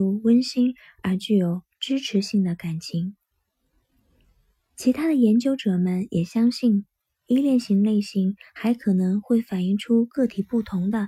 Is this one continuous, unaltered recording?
yes; 0 cuts

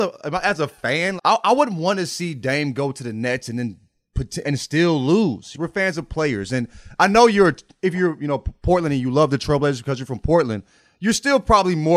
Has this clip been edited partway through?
yes; 3 cuts; at 1.2 s, 4.4 s, 5.5 s

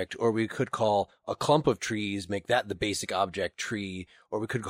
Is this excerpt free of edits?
yes; 0 cuts

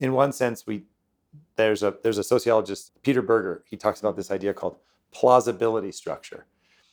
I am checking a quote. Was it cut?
yes; 1 cut; at 2.9 s

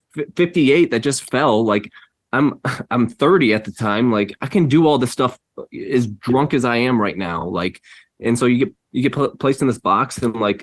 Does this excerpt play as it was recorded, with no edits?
yes; 0 cuts

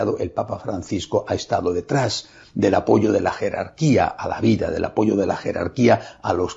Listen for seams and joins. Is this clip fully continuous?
yes; 0 cuts

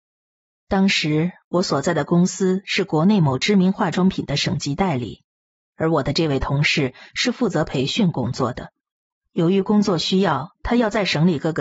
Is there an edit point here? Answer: no; 0 cuts

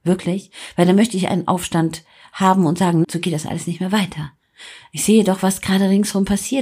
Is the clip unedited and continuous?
no; 1 cut; at 3.0 s

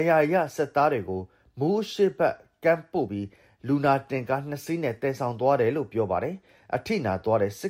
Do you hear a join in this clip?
no; 0 cuts

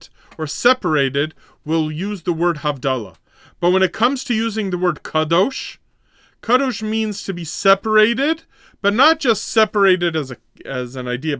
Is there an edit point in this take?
no; 0 cuts

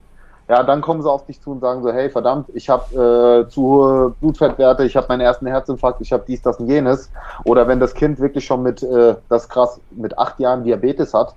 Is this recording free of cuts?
yes; 0 cuts

